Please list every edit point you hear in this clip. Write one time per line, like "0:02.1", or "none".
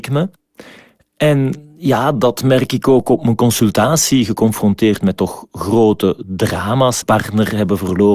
0:07.0